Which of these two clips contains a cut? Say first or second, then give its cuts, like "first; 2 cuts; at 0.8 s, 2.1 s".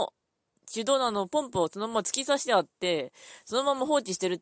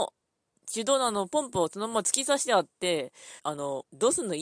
second; 1 cut; at 3.4 s